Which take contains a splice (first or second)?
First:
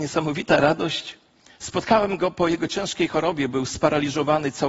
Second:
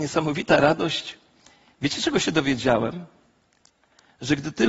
first